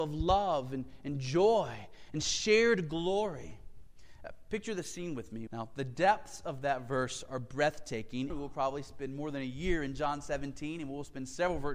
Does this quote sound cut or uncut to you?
cut